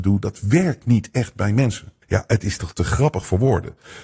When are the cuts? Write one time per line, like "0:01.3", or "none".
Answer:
0:02.0